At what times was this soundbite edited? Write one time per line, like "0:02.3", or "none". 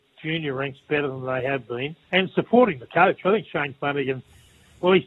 0:02.0